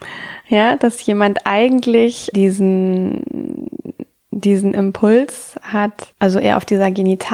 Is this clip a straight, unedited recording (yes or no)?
no